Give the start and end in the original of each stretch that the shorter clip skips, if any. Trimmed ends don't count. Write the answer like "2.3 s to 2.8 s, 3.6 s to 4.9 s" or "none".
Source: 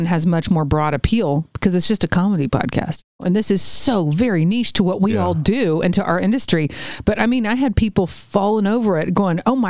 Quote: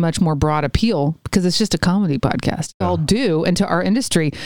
3.1 s to 5.2 s